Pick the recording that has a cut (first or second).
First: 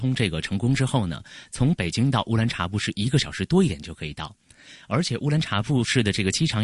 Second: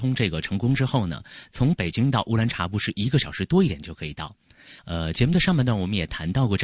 second